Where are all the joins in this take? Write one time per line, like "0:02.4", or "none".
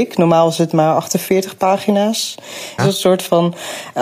0:02.8